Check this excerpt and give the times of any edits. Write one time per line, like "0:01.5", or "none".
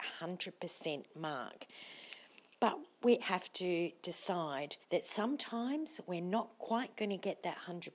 0:03.2
0:04.8